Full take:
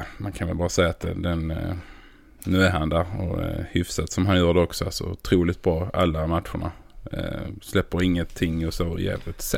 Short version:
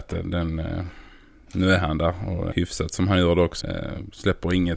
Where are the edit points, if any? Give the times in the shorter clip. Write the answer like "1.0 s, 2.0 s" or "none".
2.5 s, 3.6 s